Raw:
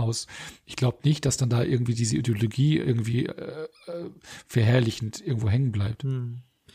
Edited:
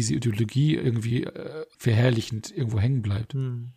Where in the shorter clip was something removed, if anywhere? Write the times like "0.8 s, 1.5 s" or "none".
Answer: 1.7 s